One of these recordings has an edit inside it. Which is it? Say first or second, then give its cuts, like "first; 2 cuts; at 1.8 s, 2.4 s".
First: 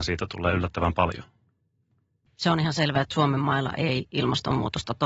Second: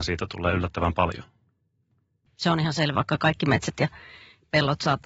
second; 1 cut; at 2.9 s